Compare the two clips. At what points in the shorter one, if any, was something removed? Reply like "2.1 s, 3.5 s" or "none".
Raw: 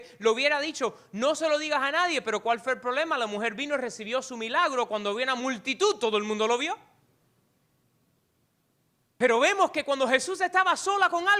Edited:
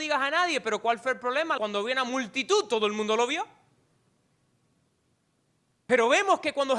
1.6 s